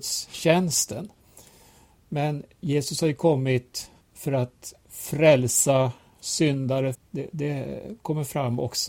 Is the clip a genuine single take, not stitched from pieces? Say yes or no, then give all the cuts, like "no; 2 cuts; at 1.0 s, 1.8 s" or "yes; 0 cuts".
no; 2 cuts; at 4.0 s, 6.9 s